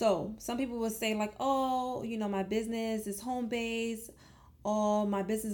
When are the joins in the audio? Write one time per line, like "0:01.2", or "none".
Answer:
none